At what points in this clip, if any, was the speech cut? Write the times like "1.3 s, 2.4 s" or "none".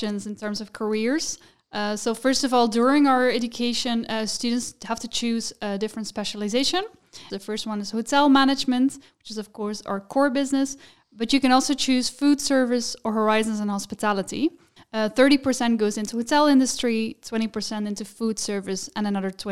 7.3 s, 14.8 s